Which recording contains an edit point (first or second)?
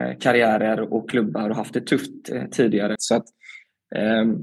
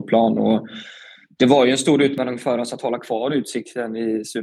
first